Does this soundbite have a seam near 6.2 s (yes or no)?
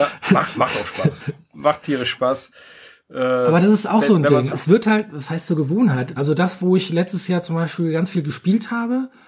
yes